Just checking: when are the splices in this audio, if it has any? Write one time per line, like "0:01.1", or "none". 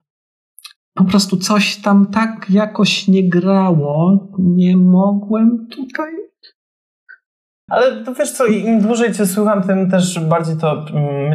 0:07.7

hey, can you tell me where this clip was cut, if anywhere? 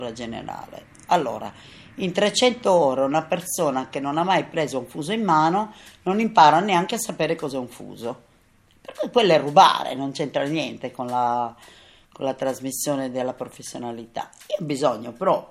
none

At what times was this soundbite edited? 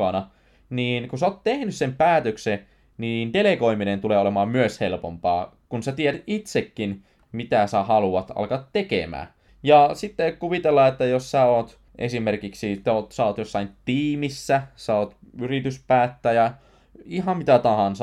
0:09.5
0:11.9

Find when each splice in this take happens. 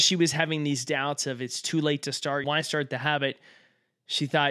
0:02.4

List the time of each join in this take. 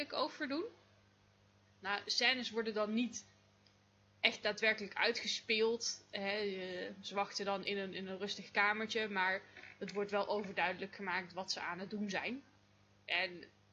0:01.7

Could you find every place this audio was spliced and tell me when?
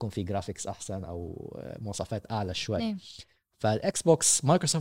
none

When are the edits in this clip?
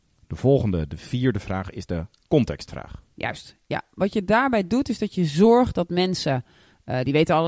0:03.1

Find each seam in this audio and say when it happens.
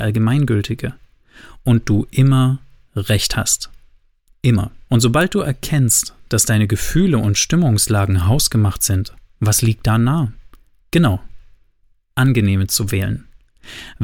0:04.9

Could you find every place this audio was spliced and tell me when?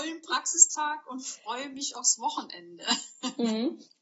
none

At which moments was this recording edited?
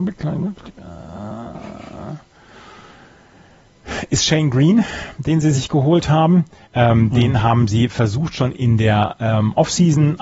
0:06.6

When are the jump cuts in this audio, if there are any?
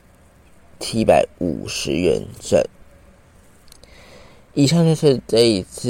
none

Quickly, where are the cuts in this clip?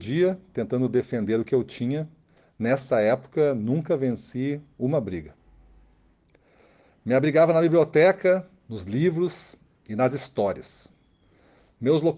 none

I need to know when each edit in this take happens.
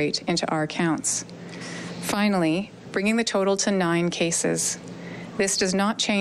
0:02.8

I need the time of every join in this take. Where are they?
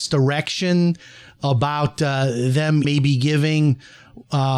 0:02.8

